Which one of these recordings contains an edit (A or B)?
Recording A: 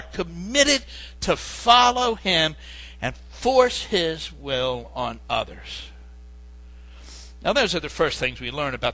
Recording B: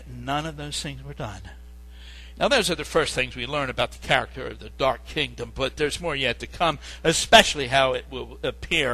B